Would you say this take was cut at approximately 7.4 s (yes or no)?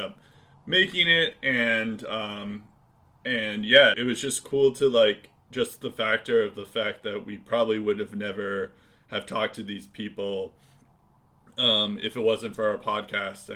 no